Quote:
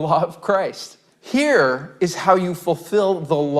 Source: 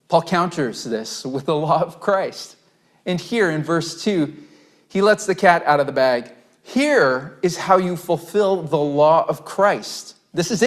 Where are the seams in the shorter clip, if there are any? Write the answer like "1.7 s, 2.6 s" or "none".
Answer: 1.1 s